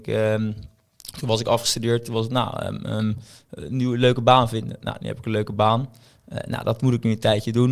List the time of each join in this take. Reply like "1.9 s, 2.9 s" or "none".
none